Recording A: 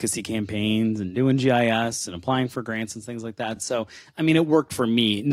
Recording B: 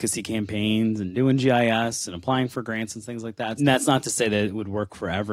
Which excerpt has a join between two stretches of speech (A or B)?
B